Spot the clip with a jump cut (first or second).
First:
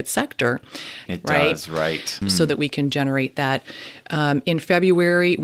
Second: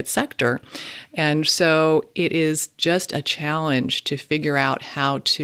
first